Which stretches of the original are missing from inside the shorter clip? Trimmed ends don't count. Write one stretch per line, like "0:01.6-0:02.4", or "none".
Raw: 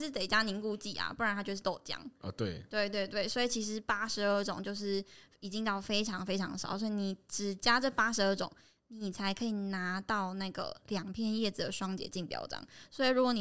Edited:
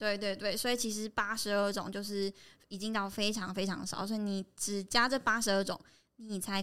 none